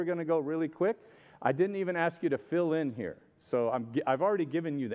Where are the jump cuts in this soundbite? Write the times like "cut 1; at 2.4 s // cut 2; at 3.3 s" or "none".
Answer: none